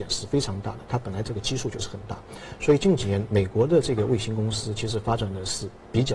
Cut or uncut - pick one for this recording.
cut